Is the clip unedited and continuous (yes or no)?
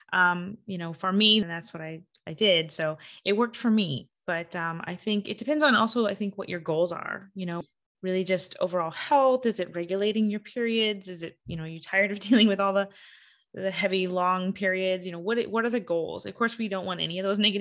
no